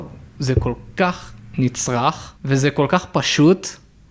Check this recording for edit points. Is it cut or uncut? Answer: cut